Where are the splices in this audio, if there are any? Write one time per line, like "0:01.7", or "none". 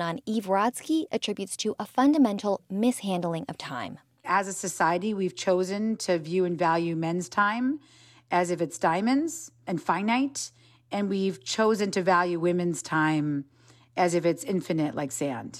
none